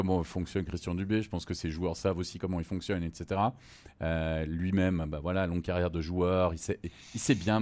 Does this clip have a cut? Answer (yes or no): no